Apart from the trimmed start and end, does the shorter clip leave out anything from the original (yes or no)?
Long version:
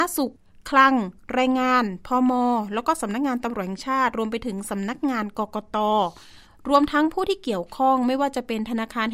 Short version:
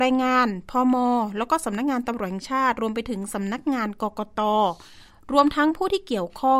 no